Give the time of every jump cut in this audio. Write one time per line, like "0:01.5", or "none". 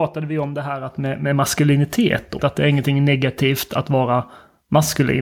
0:02.4